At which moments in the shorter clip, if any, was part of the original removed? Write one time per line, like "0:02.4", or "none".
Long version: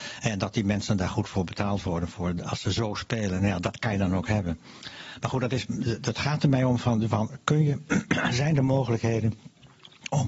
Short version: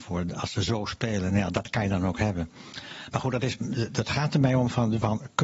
none